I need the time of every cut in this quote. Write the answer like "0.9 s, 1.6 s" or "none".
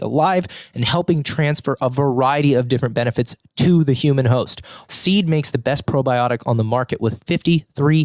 4.8 s